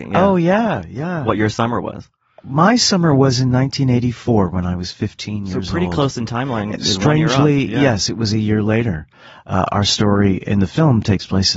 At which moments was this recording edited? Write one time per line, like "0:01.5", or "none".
none